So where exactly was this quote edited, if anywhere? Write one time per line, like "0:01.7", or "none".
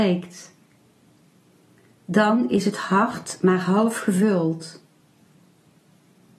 none